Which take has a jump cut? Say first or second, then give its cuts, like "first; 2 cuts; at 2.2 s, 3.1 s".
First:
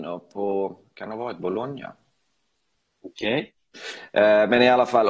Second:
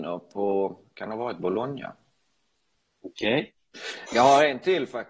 second; 1 cut; at 4.1 s